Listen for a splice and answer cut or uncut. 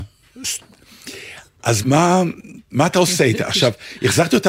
cut